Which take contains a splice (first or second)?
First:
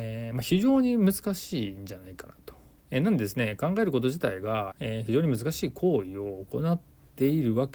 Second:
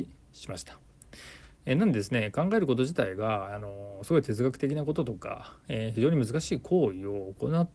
first